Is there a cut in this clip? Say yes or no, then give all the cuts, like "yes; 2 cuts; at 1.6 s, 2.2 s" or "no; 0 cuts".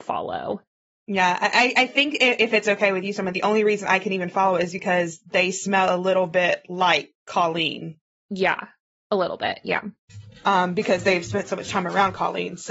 no; 0 cuts